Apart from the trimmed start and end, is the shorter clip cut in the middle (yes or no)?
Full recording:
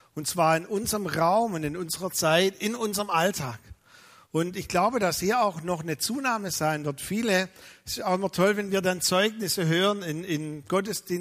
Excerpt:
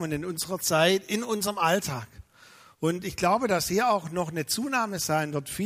no